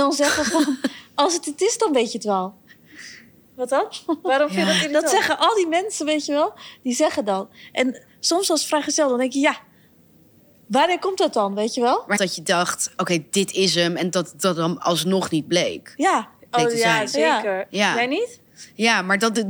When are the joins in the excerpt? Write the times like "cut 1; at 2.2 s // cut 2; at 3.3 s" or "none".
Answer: cut 1; at 12.2 s